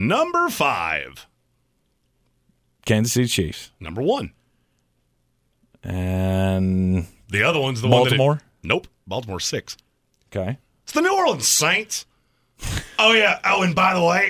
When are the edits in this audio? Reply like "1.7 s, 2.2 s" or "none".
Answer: none